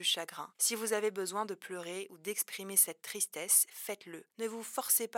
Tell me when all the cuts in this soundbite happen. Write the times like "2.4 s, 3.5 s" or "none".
none